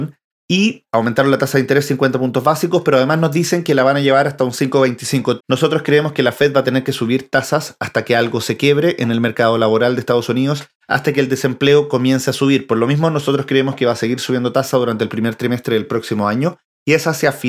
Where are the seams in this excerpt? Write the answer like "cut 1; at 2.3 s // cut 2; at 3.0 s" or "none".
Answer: cut 1; at 5.4 s